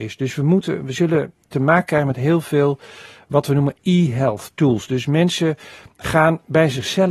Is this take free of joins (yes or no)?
yes